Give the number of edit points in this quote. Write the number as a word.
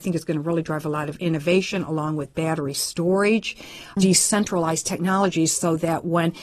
one